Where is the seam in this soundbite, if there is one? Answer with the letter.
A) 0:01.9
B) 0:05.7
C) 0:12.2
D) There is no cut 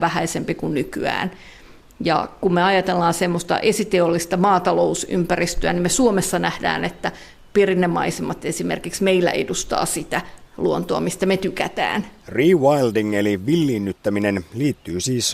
C